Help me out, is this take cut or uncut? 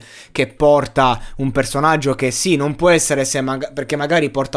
uncut